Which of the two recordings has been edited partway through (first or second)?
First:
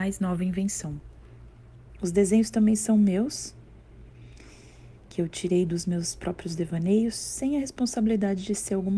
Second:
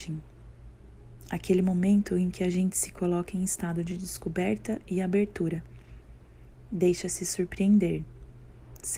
first